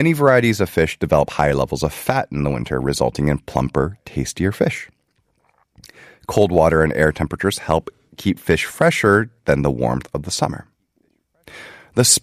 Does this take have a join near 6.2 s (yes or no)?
no